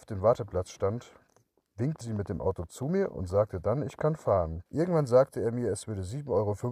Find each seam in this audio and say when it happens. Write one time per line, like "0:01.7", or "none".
0:02.0
0:04.7